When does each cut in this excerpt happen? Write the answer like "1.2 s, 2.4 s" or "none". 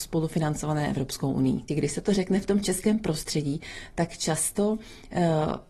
1.7 s

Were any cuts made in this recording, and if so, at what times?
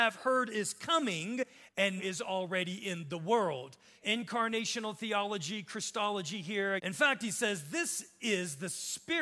2.0 s, 4.0 s, 6.8 s

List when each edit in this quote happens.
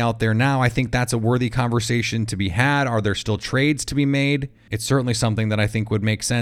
4.7 s

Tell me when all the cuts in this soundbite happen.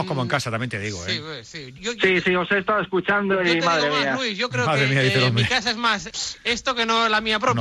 1.8 s, 6.1 s

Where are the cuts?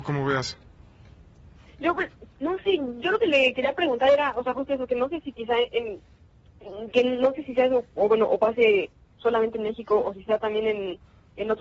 none

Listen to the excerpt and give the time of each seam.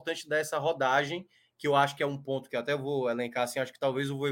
none

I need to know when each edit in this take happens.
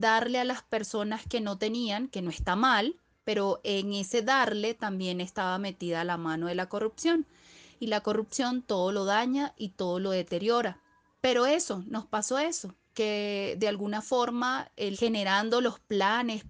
11.2 s, 14.9 s

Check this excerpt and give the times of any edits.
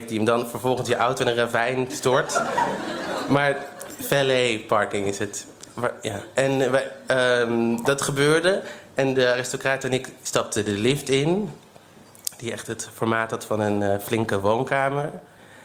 none

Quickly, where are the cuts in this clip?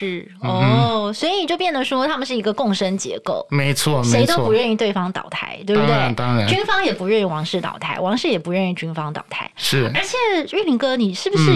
none

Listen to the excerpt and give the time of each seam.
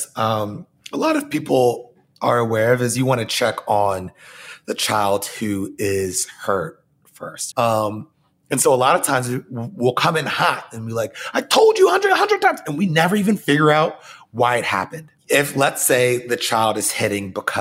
7.5 s, 15.2 s

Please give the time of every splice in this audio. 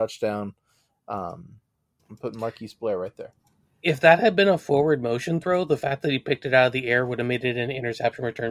2.0 s

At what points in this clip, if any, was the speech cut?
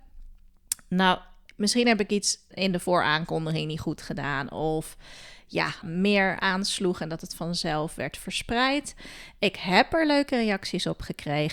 2.5 s, 5.8 s

